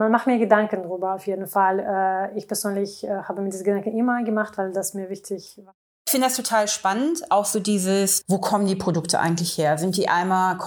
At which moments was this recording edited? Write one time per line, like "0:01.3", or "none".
0:08.2